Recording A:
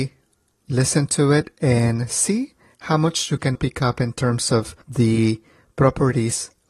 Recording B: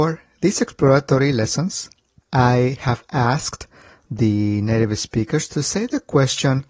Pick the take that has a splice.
A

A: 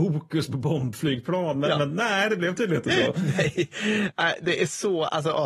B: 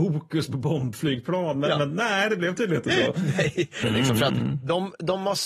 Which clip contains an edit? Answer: B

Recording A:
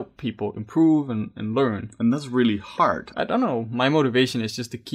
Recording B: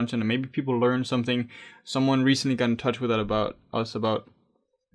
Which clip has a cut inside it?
A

